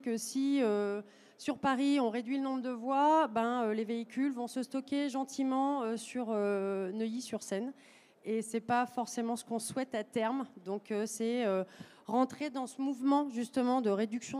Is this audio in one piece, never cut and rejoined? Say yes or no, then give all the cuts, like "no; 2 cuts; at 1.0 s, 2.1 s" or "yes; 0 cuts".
yes; 0 cuts